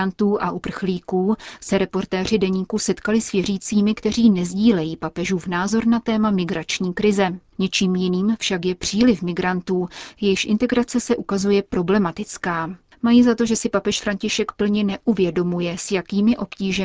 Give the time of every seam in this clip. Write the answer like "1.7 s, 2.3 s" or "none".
7.5 s

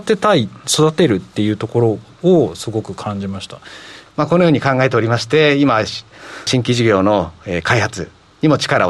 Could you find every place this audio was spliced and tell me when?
4.1 s, 6.5 s

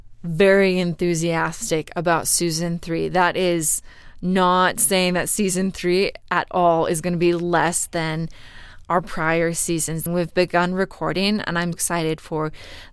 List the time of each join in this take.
10.1 s, 11.7 s

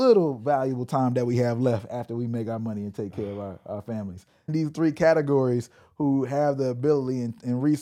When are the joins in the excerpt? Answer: 4.5 s

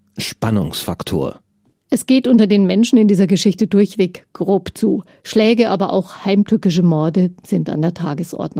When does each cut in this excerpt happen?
none

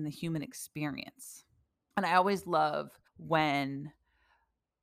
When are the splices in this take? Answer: 1.9 s, 3.1 s

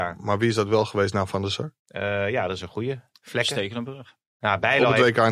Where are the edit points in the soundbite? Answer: 1.8 s

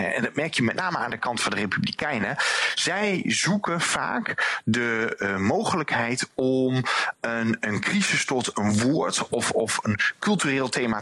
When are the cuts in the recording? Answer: 9.3 s

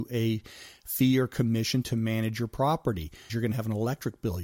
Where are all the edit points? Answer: 3.3 s

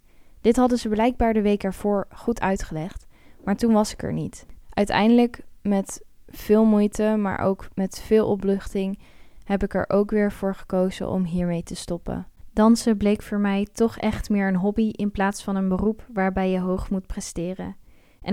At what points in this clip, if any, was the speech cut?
4.6 s

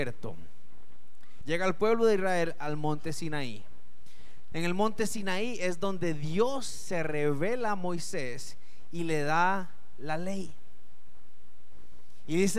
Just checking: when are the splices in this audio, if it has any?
1.4 s, 4.5 s

